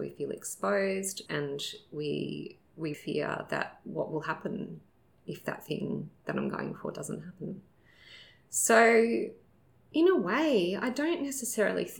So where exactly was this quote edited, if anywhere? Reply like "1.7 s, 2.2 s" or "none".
1.3 s, 2.9 s